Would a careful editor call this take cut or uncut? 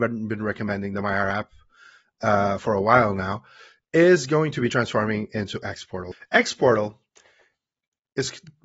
uncut